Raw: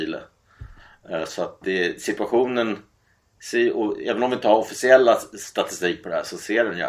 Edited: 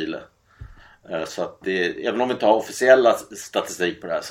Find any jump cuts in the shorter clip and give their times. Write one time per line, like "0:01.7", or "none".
0:02.0